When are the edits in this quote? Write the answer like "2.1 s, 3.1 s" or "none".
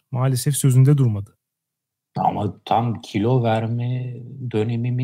none